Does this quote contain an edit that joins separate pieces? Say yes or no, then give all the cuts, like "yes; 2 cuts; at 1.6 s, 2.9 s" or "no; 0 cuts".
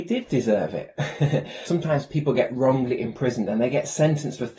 yes; 1 cut; at 1.7 s